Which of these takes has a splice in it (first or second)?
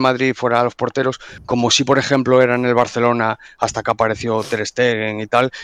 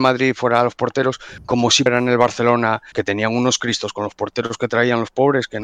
second